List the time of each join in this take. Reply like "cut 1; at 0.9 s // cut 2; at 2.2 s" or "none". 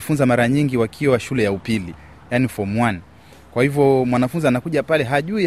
none

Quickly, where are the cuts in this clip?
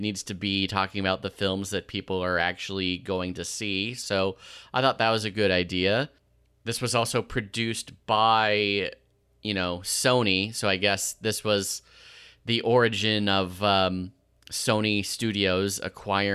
none

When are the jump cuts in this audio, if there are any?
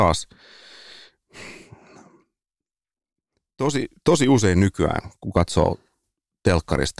none

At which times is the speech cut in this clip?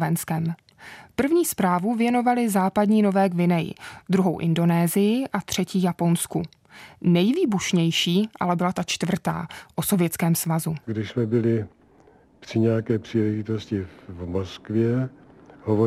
cut 1; at 10.8 s

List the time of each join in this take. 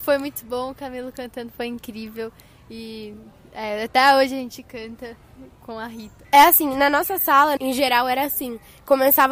cut 1; at 6.2 s // cut 2; at 7.6 s

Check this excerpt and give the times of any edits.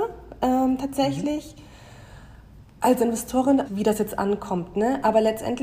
cut 1; at 3.6 s

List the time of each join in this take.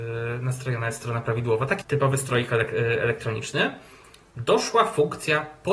cut 1; at 1.8 s

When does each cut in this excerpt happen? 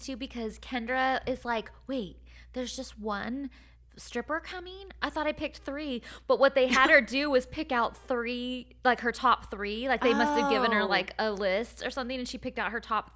none

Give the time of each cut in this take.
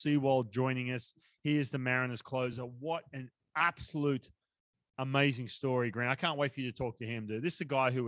none

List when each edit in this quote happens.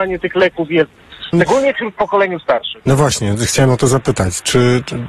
cut 1; at 1.3 s

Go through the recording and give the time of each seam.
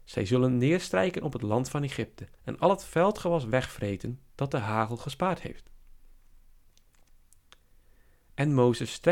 cut 1; at 2.3 s

